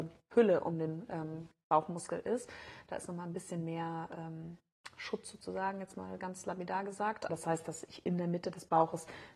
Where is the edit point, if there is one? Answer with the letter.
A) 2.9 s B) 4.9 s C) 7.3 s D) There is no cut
C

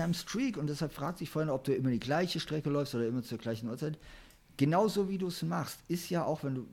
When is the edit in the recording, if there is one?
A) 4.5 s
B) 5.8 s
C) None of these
C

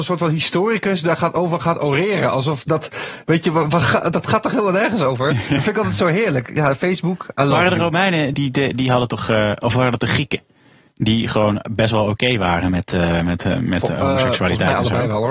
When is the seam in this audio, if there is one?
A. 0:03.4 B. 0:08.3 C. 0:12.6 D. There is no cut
B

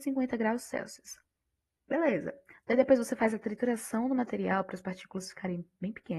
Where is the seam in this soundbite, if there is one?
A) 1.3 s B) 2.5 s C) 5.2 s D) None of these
D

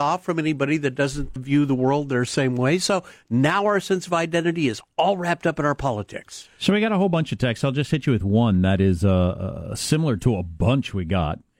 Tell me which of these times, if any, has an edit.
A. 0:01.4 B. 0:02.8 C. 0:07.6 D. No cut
A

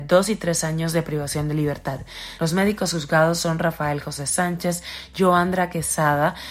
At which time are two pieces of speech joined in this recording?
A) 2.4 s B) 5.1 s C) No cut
A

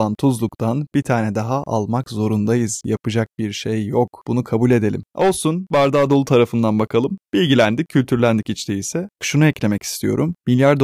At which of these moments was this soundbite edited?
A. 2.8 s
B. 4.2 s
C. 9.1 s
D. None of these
C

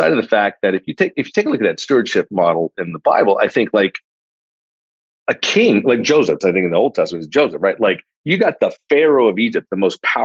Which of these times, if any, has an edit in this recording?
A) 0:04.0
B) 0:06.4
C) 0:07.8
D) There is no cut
B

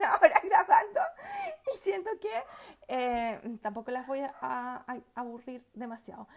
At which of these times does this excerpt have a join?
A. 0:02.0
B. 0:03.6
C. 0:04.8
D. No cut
B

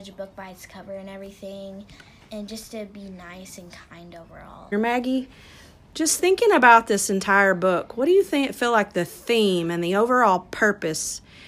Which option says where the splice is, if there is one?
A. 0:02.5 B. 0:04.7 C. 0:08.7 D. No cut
B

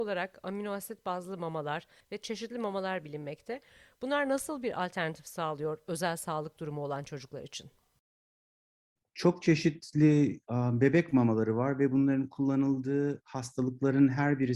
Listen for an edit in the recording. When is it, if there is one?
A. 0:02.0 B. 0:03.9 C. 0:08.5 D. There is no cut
A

